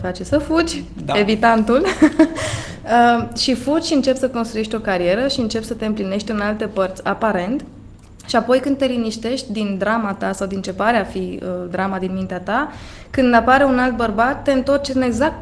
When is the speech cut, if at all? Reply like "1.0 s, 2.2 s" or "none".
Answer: none